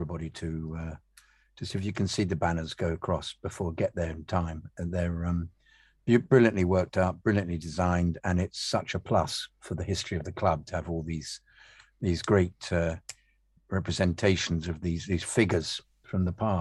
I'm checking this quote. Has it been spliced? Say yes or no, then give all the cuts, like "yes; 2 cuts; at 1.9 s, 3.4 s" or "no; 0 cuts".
no; 0 cuts